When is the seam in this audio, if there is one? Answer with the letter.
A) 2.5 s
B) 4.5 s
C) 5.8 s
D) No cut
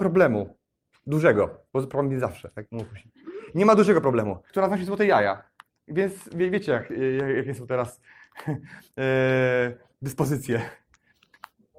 B